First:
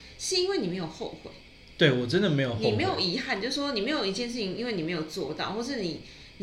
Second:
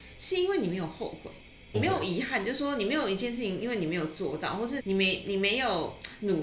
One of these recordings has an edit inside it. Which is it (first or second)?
second